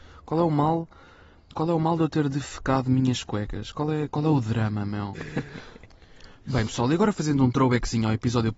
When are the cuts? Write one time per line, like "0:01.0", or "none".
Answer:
0:05.1